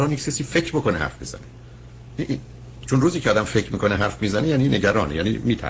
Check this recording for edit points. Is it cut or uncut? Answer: cut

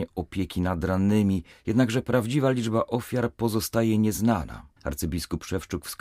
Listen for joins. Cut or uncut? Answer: cut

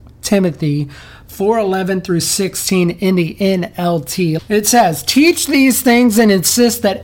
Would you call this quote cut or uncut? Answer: cut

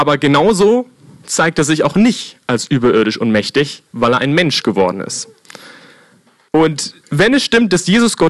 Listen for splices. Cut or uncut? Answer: cut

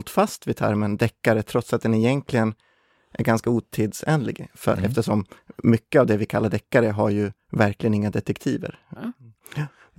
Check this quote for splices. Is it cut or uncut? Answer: cut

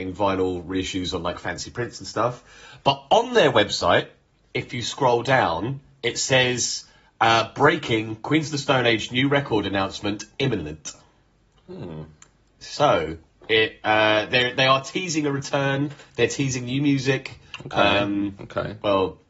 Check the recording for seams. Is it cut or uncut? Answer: uncut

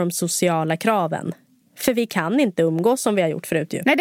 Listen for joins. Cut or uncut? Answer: uncut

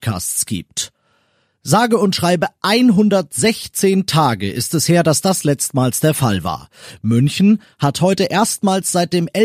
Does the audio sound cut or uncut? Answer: uncut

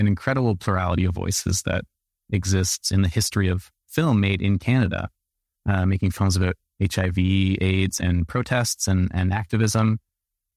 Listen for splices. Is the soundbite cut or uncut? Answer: cut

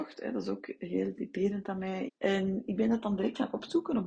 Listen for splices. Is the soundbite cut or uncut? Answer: cut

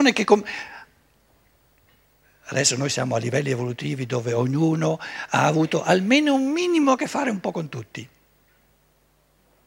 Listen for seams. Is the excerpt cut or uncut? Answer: uncut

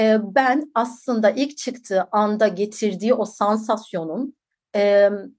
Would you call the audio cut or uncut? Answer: uncut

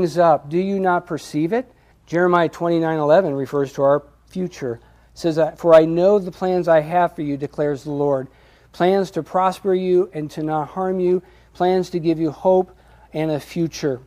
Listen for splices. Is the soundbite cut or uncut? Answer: cut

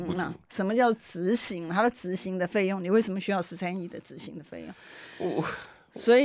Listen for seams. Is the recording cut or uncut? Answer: uncut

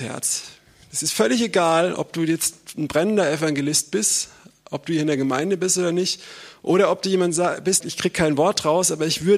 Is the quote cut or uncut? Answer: cut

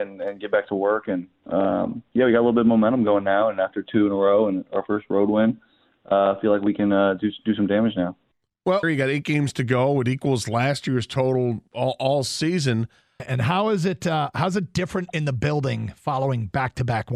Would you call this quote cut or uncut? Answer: cut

